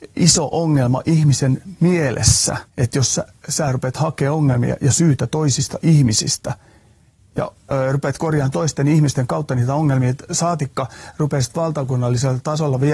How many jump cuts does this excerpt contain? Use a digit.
1